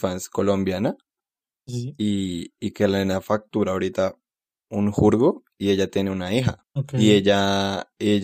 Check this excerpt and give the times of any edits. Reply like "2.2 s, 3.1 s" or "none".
none